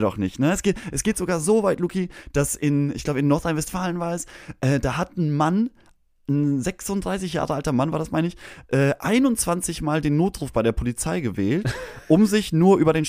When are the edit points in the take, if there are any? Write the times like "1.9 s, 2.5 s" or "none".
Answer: none